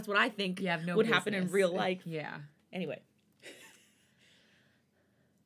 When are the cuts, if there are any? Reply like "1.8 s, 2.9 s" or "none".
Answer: none